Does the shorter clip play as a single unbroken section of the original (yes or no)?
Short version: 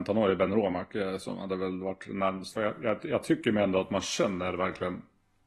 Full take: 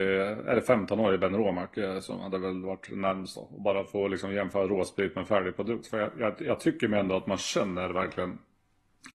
no